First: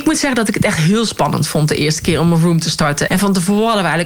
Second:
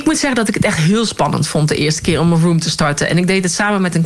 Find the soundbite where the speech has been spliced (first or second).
first